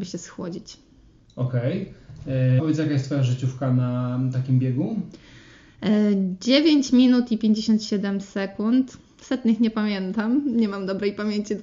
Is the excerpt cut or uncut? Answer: cut